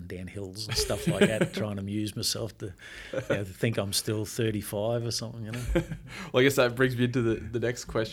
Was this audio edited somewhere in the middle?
no; 0 cuts

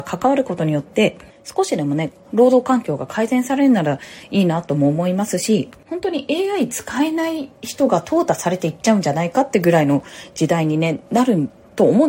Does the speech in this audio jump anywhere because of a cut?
yes; 1 cut; at 2.2 s

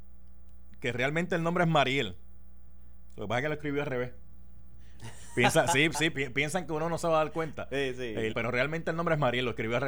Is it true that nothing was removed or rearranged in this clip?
no; 2 cuts; at 6.1 s, 8.3 s

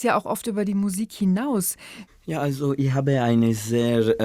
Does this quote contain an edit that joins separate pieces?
yes; 1 cut; at 2.1 s

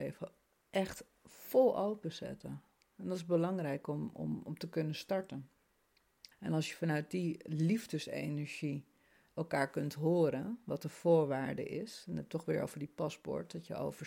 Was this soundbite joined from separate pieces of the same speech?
yes; 1 cut; at 6.3 s

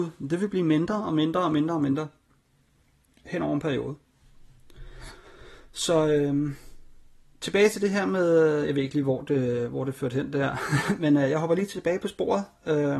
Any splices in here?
no; 0 cuts

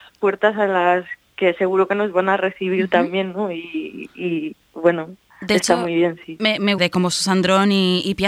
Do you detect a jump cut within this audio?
yes; 1 cut; at 6.8 s

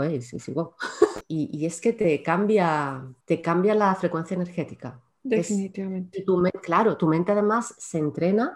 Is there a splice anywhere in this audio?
yes; 2 cuts; at 1.2 s, 3.2 s

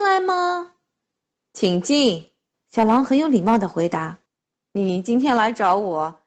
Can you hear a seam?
yes; 2 cuts; at 2.5 s, 4.3 s

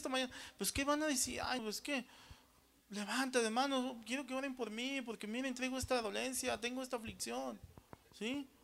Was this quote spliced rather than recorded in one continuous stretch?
yes; 1 cut; at 1.6 s

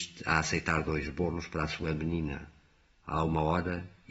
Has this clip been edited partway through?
no; 0 cuts

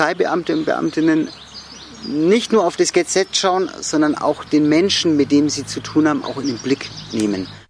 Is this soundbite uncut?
no; 1 cut; at 6.2 s

